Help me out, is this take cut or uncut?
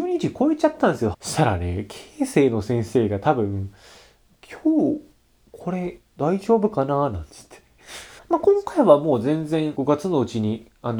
cut